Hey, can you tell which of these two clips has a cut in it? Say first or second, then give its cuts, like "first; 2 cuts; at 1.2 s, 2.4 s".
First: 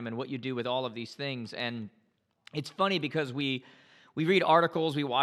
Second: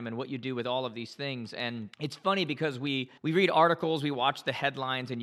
second; 2 cuts; at 1.9 s, 3.2 s